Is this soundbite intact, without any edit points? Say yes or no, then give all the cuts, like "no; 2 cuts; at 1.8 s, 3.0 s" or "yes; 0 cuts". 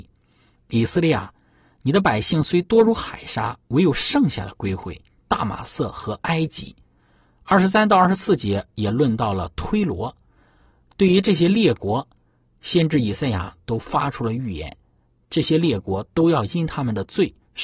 no; 1 cut; at 5.2 s